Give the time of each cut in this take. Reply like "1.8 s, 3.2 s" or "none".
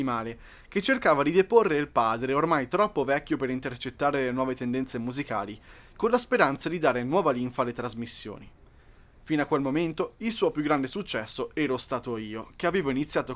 none